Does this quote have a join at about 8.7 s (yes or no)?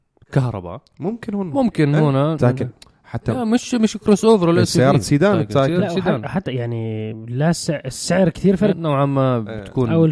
yes